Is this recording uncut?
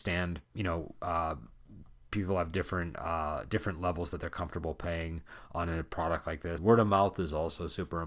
no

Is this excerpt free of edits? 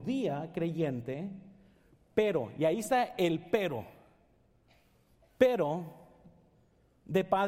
yes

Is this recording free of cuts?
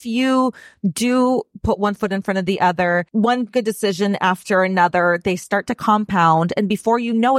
yes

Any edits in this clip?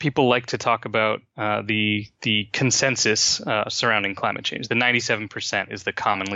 no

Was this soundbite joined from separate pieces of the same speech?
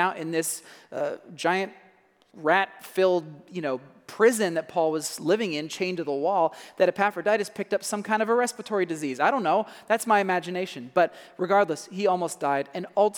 no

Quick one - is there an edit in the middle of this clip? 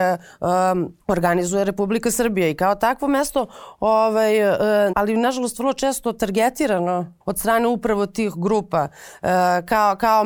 yes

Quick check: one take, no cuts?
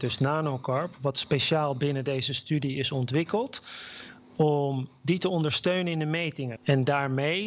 no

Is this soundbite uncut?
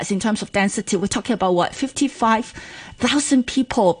yes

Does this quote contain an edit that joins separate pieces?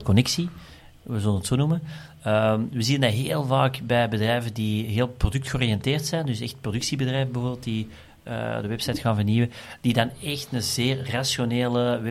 no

